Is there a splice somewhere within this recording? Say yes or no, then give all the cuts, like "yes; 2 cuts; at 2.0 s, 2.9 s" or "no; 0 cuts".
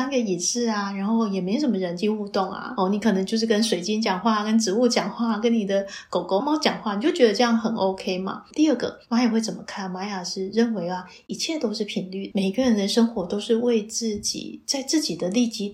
yes; 3 cuts; at 6.4 s, 8.5 s, 12.3 s